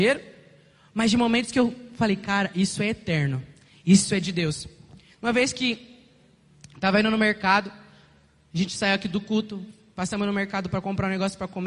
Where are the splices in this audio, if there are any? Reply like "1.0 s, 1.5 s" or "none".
none